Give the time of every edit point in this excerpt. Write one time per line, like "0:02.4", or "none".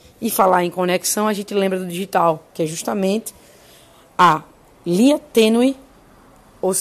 none